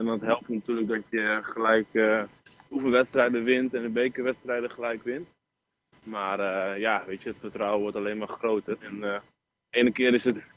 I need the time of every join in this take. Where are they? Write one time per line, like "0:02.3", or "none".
0:08.8